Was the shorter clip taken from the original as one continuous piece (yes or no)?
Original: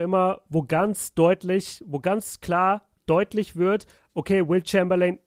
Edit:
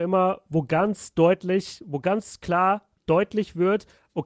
yes